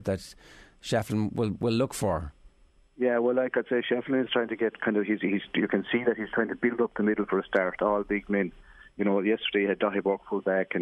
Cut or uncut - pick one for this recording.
uncut